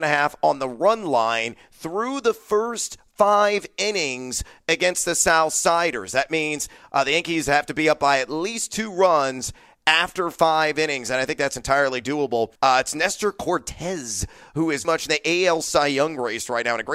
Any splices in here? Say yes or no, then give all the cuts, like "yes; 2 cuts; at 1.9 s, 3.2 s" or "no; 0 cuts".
yes; 2 cuts; at 12.6 s, 14.8 s